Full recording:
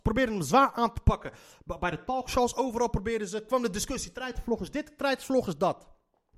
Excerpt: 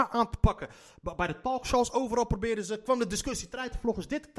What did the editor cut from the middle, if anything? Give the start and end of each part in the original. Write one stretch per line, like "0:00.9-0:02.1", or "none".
none